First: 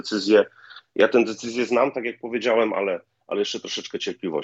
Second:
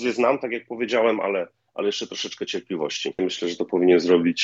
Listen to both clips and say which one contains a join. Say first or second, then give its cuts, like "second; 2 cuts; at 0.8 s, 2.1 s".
second; 1 cut; at 3.2 s